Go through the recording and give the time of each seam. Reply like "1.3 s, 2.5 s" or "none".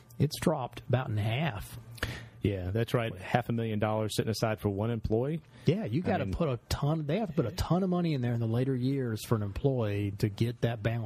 3.1 s, 10.1 s